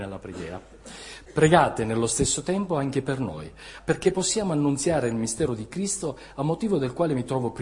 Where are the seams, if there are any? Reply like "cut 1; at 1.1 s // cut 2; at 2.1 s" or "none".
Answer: cut 1; at 1.3 s // cut 2; at 3.8 s